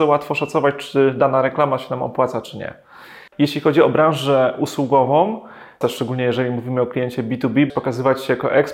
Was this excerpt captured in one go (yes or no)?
no